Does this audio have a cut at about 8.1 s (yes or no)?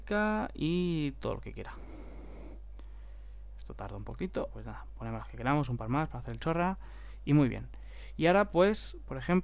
no